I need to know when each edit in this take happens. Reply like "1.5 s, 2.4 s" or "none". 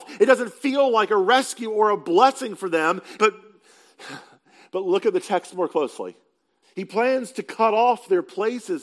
3.2 s, 6.6 s